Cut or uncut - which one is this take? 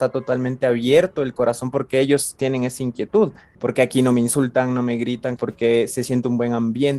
cut